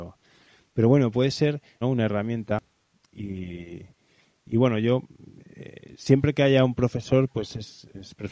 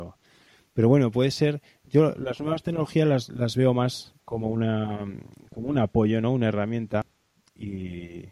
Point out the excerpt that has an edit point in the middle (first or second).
first